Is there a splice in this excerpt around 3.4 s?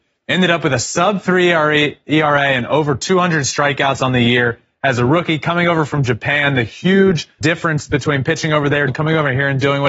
no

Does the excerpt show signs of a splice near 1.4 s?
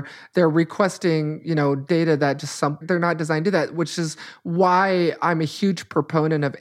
no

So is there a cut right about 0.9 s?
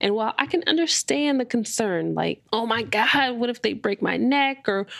no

